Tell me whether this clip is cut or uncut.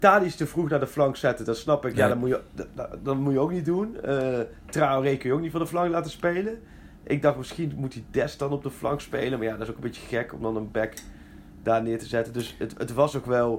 uncut